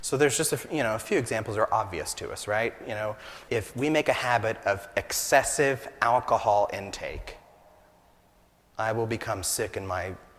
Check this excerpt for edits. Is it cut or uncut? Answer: cut